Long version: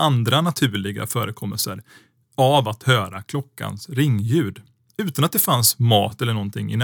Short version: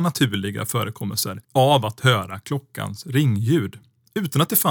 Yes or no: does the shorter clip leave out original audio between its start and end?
yes